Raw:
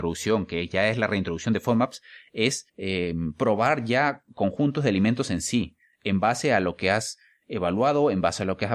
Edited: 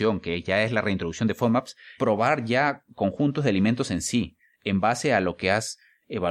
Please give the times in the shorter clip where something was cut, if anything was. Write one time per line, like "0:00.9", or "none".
0:02.0